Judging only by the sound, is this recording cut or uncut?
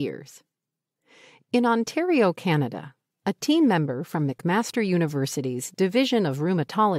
uncut